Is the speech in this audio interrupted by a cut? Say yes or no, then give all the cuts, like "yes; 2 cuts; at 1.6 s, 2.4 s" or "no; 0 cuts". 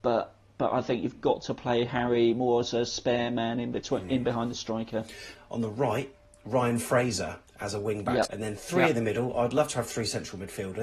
yes; 2 cuts; at 5.3 s, 8.2 s